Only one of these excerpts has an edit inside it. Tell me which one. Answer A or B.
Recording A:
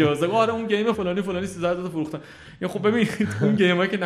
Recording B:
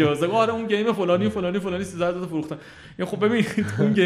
A